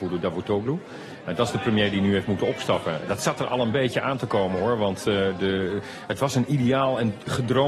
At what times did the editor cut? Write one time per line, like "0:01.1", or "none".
none